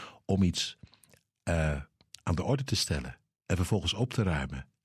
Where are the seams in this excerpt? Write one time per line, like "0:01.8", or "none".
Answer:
none